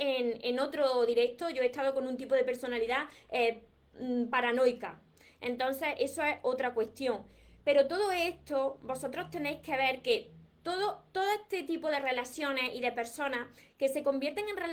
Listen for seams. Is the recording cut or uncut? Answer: uncut